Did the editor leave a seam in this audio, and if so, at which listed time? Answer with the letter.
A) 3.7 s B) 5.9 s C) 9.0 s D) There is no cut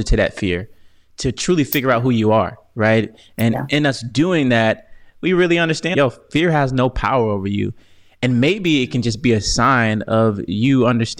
B